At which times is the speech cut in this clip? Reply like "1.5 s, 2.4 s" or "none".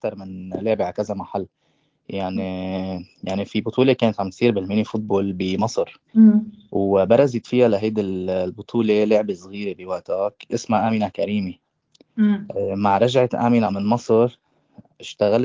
6.1 s, 13.7 s